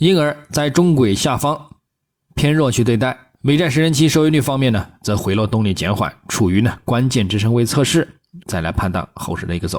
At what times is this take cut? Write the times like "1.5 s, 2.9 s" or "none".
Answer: 3.3 s, 8.4 s